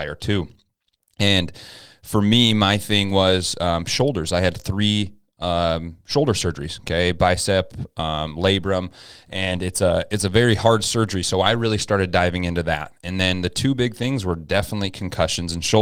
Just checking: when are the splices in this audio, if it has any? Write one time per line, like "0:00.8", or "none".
none